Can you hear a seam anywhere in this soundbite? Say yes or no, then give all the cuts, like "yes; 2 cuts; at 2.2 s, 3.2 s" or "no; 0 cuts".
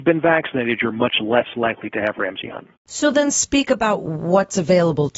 yes; 1 cut; at 2.8 s